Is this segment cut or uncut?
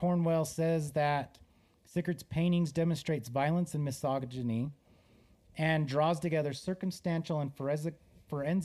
uncut